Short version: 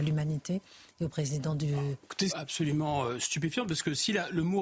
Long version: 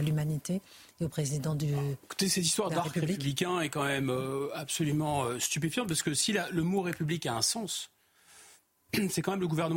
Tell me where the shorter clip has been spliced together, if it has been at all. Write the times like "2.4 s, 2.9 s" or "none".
2.3 s